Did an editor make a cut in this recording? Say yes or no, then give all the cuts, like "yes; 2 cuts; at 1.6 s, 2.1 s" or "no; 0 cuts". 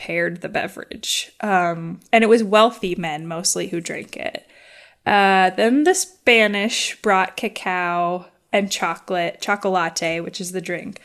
no; 0 cuts